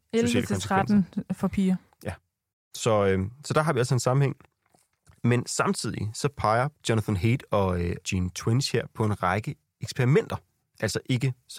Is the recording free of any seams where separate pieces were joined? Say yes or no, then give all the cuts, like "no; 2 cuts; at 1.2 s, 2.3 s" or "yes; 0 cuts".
no; 1 cut; at 8.0 s